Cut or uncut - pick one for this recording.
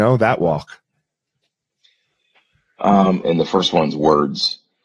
cut